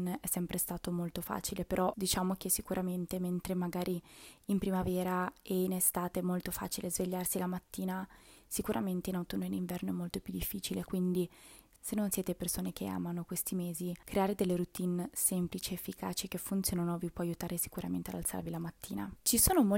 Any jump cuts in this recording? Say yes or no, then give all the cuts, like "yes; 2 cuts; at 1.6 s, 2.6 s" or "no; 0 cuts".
no; 0 cuts